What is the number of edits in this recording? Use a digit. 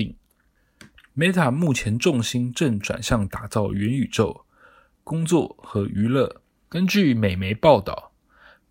2